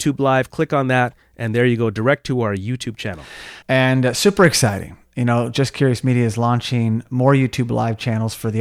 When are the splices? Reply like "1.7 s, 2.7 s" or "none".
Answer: 3.6 s